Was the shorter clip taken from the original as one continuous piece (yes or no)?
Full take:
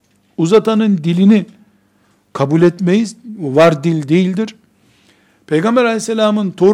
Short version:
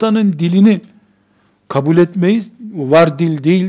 yes